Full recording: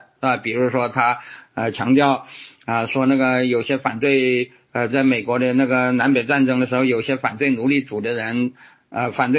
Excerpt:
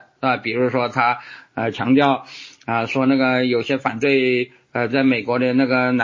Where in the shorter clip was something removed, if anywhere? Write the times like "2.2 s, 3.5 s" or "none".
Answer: none

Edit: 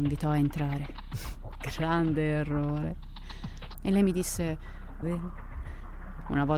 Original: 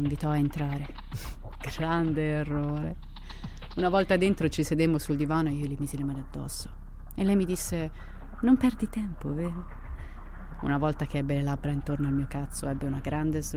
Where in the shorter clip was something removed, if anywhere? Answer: 3.7 s, 5.0 s

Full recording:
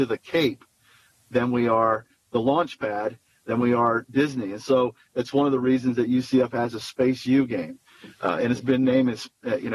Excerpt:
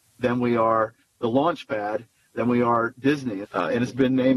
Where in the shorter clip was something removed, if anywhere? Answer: 3.4 s

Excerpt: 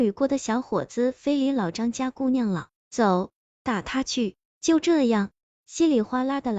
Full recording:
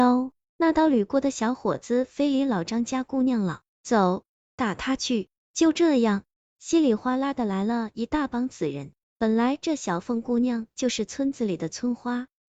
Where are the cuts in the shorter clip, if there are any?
none

